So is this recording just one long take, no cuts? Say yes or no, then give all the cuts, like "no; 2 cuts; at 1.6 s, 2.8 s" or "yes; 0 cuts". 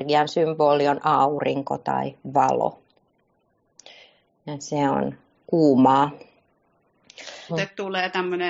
no; 1 cut; at 7.5 s